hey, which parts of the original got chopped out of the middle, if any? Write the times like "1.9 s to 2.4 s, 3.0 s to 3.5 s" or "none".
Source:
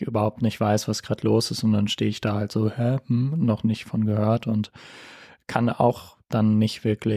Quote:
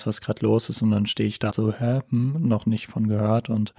2.3 s to 2.5 s

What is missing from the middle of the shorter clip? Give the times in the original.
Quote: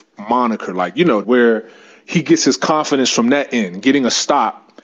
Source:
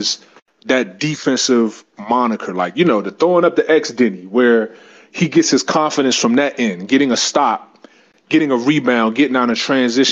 3.0 s to 4.3 s

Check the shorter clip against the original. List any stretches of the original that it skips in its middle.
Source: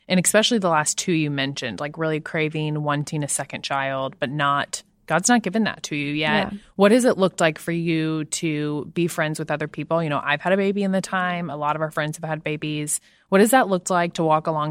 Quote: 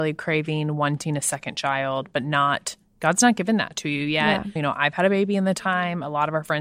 6.6 s to 10.0 s

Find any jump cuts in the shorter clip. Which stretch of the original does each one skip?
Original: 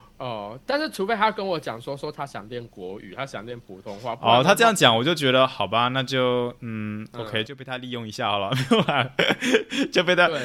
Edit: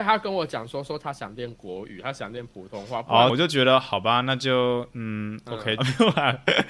4.4 s to 5.0 s, 7.5 s to 8.5 s

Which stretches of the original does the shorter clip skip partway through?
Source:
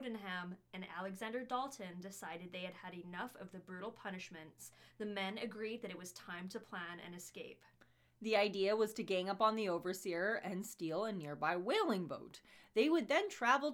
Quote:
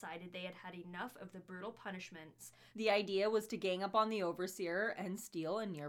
4.9 s to 8.2 s

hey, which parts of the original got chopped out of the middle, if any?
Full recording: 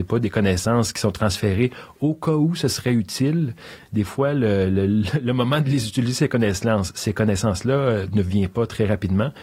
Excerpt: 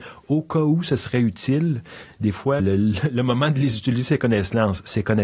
4.3 s to 4.7 s

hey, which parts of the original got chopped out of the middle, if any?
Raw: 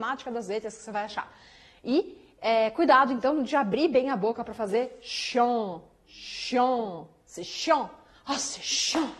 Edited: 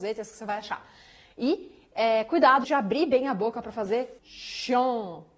3.1 s to 3.5 s, 5.0 s to 6.0 s

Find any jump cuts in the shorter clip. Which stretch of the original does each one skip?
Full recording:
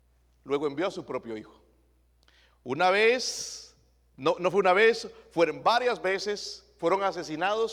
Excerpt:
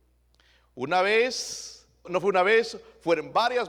3.9 s to 4.4 s

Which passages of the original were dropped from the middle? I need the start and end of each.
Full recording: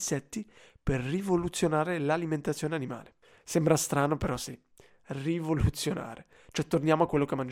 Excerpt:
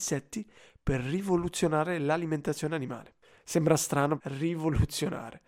4.2 s to 5.0 s

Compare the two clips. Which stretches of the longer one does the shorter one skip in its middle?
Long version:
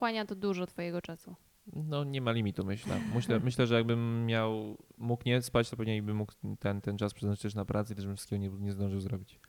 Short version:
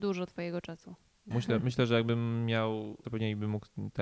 1.7 s to 3.1 s, 4.8 s to 5.7 s

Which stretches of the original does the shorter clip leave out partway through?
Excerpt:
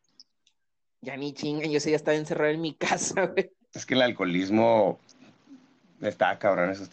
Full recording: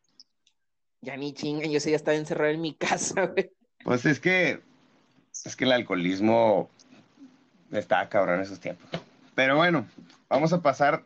3.7 s to 5.4 s

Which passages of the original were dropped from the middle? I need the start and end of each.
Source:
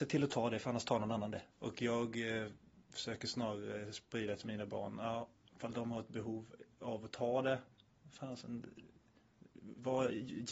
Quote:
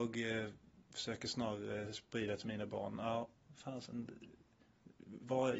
5.4 s to 7.9 s

